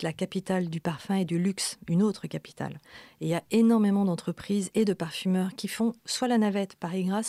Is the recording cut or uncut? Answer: uncut